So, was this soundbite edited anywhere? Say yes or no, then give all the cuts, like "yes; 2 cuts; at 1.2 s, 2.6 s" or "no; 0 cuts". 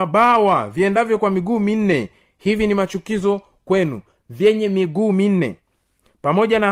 no; 0 cuts